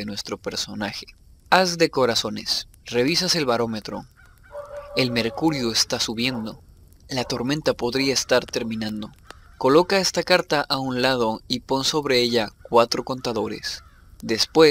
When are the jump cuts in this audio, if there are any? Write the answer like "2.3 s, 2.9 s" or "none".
none